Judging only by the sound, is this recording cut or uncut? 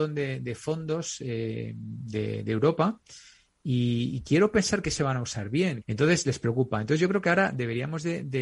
cut